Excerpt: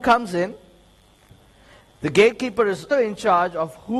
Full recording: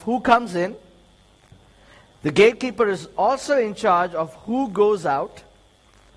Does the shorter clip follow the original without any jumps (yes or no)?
no